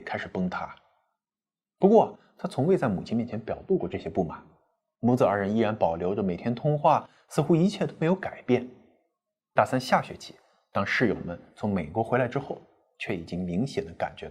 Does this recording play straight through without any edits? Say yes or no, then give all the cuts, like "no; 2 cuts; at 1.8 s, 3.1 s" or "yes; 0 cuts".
yes; 0 cuts